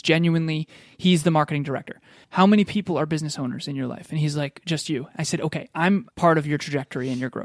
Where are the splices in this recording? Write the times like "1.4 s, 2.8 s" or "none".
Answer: 2.2 s, 6.1 s